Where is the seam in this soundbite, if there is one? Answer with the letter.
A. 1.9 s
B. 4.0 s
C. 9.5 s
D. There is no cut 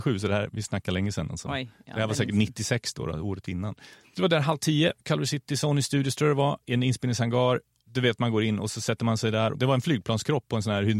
D